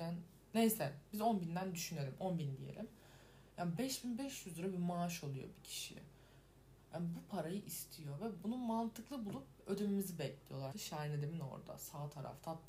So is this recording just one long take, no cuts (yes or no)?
no